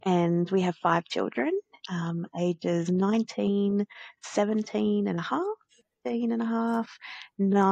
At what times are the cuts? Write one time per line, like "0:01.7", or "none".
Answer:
none

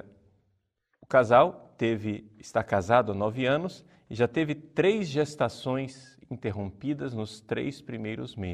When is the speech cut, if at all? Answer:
none

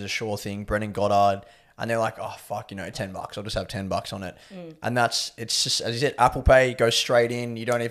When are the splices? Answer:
0:02.9

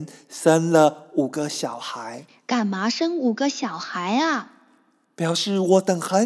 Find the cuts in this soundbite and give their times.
none

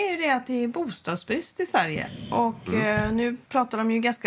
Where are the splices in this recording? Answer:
none

